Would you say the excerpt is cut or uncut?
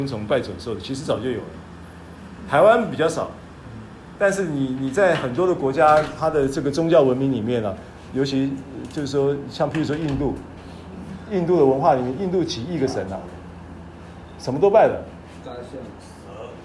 uncut